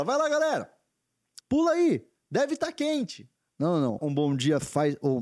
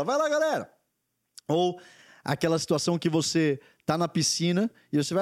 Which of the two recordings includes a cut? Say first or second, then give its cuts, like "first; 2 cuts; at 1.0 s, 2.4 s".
first; 2 cuts; at 1.4 s, 4.0 s